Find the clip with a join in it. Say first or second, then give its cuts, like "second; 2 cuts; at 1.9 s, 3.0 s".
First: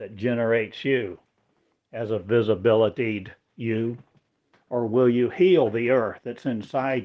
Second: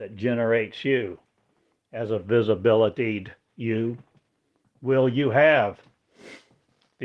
first; 1 cut; at 4.5 s